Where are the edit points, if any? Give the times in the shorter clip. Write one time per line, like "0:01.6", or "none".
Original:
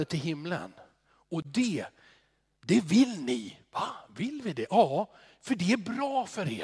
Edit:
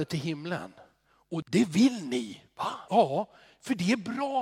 0:01.4
0:02.9